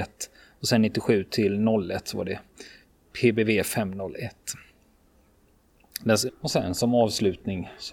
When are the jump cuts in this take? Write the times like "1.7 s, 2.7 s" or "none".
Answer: 6.3 s